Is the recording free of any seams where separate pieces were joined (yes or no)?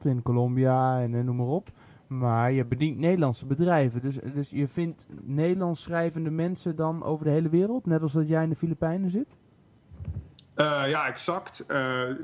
yes